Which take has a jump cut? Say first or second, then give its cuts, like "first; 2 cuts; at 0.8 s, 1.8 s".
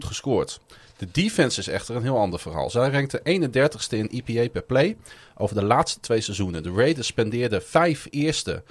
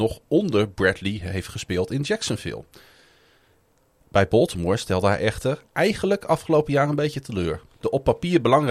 second; 1 cut; at 7.8 s